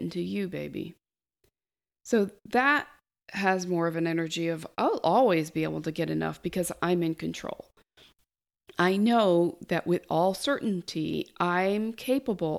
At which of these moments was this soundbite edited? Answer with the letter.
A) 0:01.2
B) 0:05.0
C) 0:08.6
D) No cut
D